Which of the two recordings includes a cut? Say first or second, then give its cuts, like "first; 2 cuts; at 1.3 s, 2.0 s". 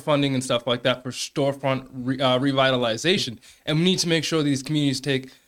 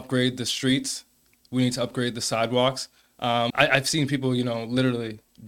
second; 1 cut; at 3.5 s